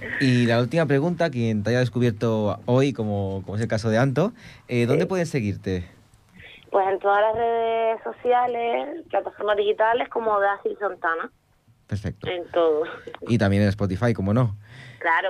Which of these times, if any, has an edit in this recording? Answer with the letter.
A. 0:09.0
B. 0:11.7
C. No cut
B